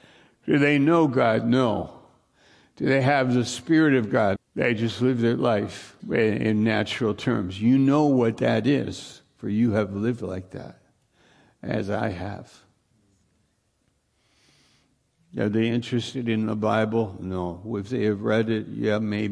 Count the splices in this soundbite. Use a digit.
2